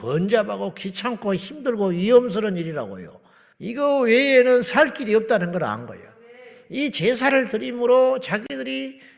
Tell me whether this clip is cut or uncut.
cut